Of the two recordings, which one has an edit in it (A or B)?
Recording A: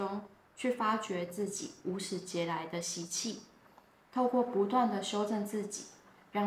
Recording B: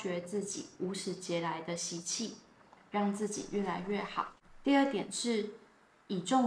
B